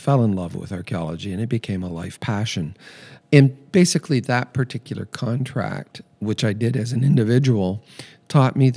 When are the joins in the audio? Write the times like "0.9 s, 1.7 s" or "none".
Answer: 3.2 s